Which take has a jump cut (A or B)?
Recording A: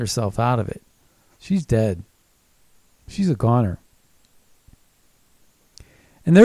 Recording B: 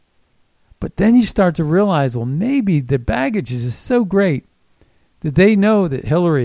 A